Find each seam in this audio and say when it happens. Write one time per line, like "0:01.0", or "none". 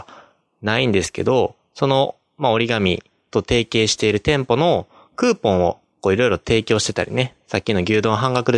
none